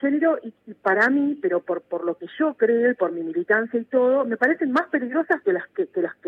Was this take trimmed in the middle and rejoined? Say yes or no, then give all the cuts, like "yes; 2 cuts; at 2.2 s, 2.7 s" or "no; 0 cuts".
no; 0 cuts